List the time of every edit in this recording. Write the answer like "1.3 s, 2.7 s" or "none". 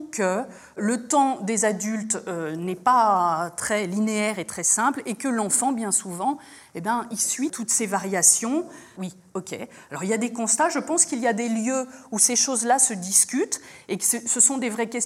8.9 s